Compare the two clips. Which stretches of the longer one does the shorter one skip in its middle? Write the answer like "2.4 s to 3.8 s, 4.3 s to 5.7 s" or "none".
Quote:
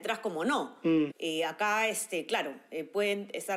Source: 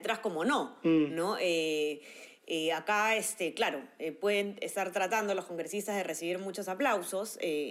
1.1 s to 2.4 s